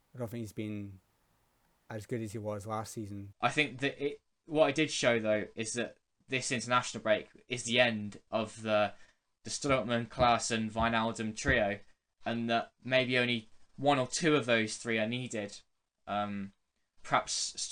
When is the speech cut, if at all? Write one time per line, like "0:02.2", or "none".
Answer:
0:03.3